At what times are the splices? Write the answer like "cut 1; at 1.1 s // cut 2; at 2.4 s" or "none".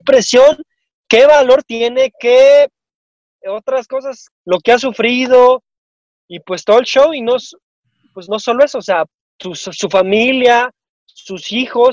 cut 1; at 4.3 s